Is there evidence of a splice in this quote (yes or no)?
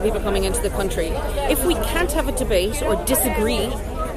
no